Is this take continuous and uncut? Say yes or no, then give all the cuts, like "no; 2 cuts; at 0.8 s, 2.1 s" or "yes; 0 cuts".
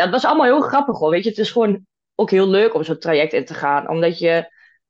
yes; 0 cuts